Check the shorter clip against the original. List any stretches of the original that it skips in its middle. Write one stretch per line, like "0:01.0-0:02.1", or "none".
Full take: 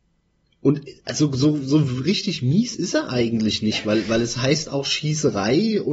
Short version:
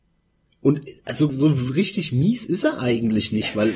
0:01.3-0:01.6